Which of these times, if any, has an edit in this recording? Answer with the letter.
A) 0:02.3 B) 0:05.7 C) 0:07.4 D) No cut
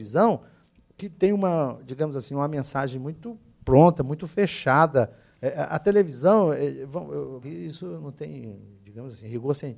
C